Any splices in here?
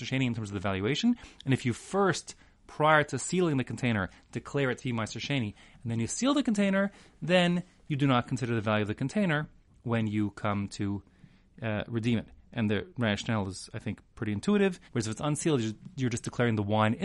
yes; 1 cut; at 14.9 s

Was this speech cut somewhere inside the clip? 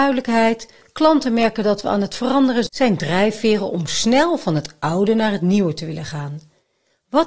yes; 1 cut; at 2.7 s

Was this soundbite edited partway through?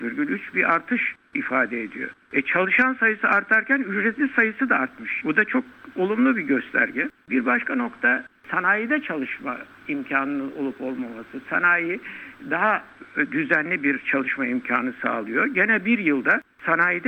yes; 1 cut; at 5.2 s

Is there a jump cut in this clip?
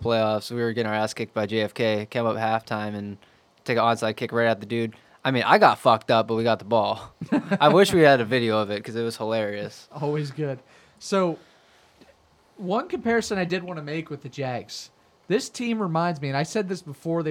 no; 0 cuts

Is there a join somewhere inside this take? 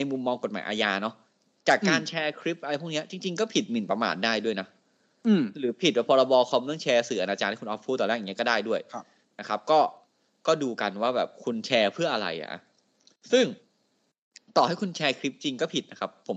no; 0 cuts

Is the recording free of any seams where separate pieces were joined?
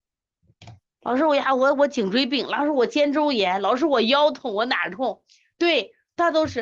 yes; 0 cuts

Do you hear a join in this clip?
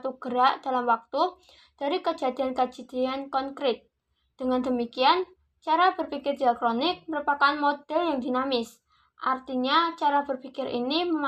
no; 0 cuts

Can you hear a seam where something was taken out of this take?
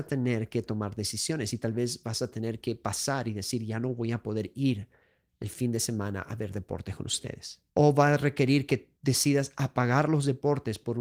yes; 2 cuts; at 7.7 s, 9.0 s

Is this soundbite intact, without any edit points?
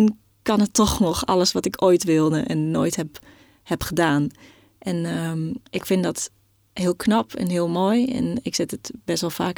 no; 1 cut; at 5.7 s

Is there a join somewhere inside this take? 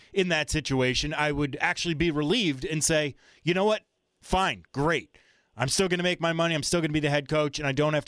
no; 0 cuts

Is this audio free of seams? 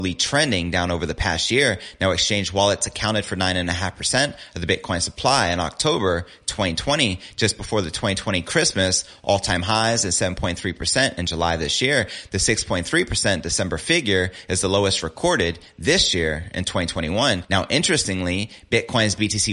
yes; 0 cuts

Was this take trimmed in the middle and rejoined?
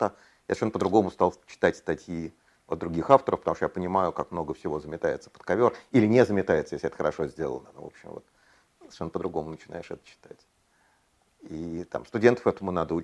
no; 0 cuts

